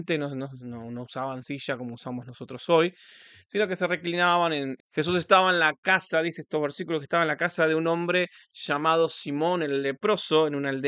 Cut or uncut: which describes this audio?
cut